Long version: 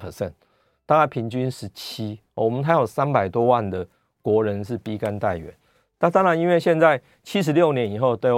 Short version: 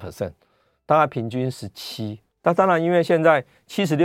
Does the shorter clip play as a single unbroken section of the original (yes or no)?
no